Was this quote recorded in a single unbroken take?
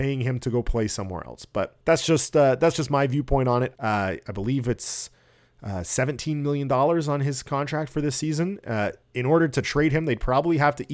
no; 2 cuts; at 1.8 s, 3.8 s

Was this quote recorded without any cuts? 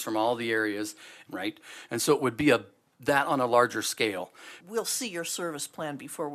no; 2 cuts; at 1.3 s, 4.6 s

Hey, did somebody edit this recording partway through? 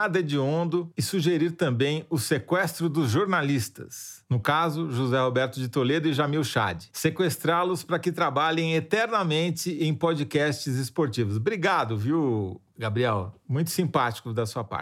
no; 0 cuts

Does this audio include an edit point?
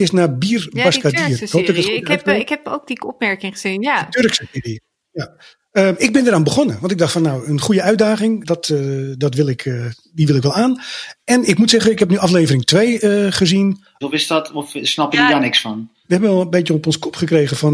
yes; 3 cuts; at 8.4 s, 14.0 s, 16.0 s

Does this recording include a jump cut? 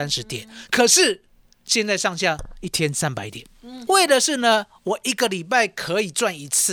yes; 1 cut; at 3.9 s

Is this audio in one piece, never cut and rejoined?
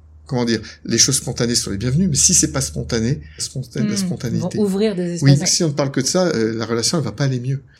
no; 2 cuts; at 3.4 s, 5.4 s

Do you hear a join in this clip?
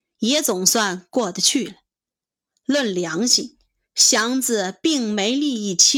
no; 0 cuts

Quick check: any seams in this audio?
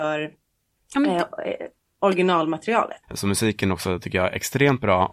yes; 1 cut; at 3.0 s

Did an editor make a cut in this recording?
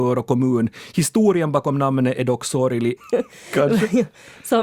yes; 1 cut; at 3.0 s

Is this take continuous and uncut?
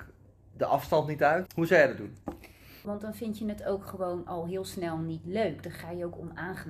no; 2 cuts; at 1.5 s, 2.8 s

